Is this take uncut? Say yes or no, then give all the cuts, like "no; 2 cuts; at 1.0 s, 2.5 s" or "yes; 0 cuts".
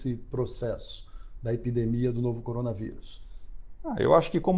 yes; 0 cuts